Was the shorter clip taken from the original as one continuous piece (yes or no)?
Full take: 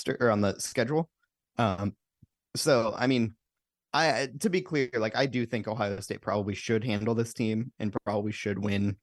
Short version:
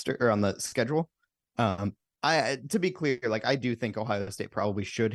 no